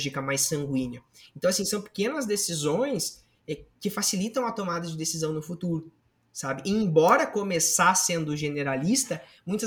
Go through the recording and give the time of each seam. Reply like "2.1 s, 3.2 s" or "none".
none